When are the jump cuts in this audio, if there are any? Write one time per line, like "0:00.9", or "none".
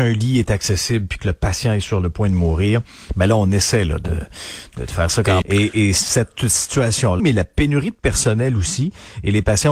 0:05.4
0:07.2